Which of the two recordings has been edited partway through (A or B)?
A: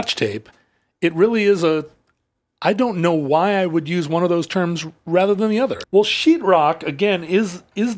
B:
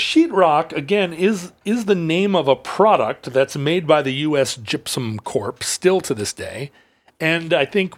A